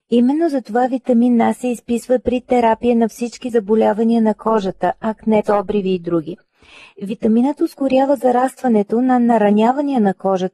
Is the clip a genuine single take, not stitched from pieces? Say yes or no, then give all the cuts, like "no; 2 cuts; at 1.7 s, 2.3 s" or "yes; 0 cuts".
no; 1 cut; at 5.4 s